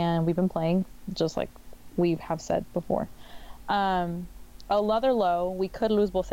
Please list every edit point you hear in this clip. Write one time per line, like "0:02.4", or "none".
none